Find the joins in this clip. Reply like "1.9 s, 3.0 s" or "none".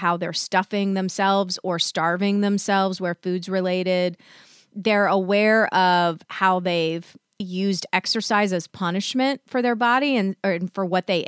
7.4 s